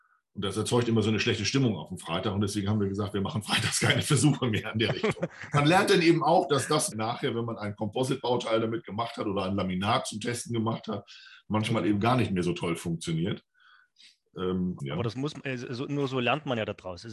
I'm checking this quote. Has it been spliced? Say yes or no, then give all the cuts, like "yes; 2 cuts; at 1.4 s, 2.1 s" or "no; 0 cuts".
yes; 3 cuts; at 5.5 s, 6.9 s, 14.8 s